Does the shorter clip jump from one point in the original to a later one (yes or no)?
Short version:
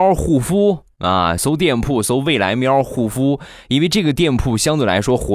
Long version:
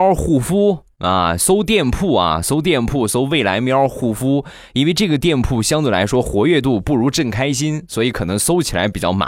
yes